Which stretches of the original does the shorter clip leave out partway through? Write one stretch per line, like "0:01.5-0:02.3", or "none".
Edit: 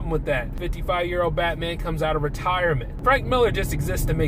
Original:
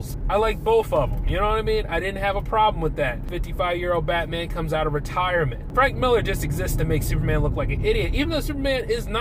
none